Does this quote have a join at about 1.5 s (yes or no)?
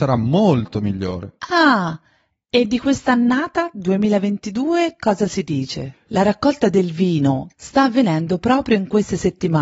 no